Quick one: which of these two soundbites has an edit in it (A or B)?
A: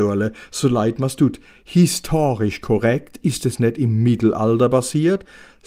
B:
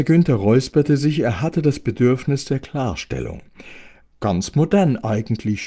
B